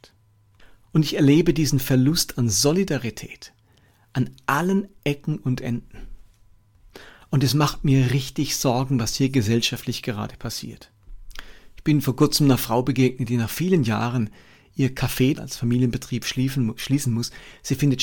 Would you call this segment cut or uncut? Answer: cut